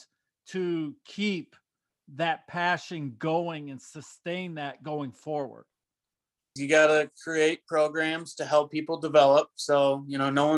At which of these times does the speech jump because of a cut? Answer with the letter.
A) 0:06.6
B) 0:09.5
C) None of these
A